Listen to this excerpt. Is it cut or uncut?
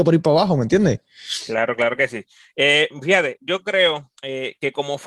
cut